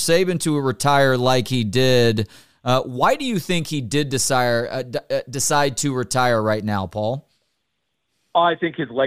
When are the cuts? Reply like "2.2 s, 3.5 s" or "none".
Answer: none